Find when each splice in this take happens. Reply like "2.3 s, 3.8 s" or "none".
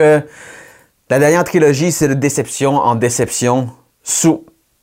none